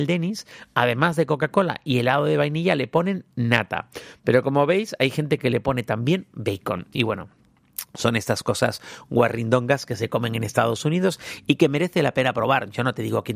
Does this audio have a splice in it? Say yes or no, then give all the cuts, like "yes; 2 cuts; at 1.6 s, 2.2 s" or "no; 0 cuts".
no; 0 cuts